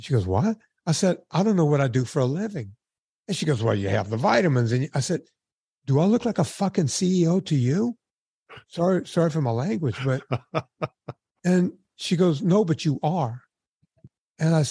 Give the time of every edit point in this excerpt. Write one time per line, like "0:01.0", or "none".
none